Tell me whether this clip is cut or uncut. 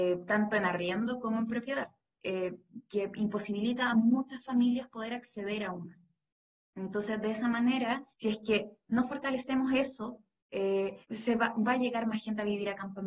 cut